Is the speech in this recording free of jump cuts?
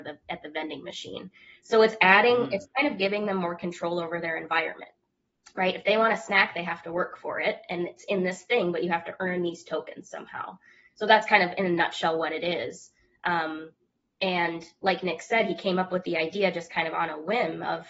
yes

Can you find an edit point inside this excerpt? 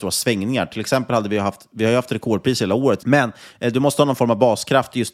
yes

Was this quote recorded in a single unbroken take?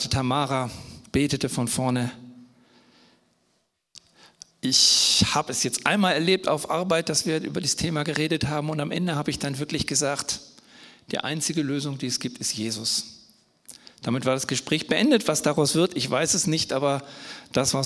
no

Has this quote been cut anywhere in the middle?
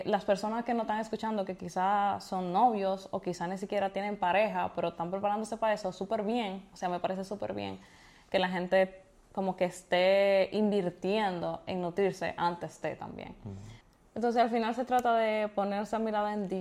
no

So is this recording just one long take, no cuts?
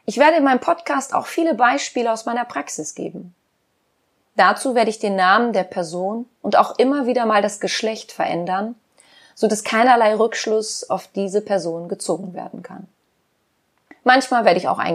yes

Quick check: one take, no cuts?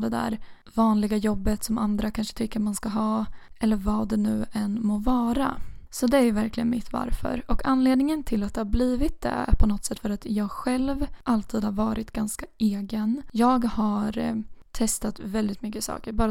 yes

